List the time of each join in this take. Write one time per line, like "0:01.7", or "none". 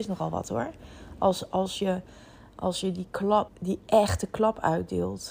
0:03.5